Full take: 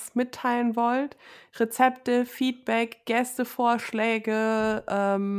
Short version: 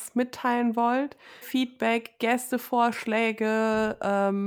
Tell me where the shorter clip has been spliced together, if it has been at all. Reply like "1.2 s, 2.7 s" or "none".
1.4 s